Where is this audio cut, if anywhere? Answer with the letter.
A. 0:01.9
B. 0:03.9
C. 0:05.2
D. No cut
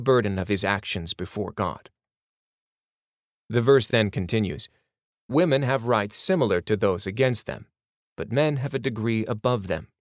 D